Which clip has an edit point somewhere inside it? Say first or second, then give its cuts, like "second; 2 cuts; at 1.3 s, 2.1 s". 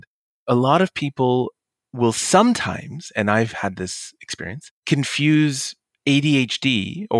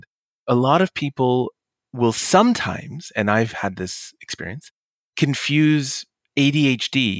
first; 1 cut; at 4.8 s